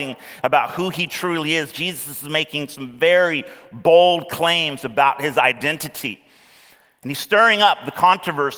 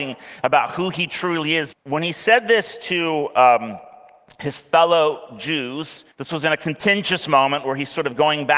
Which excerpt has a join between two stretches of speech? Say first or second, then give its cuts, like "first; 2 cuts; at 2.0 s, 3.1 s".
second; 2 cuts; at 1.7 s, 6.1 s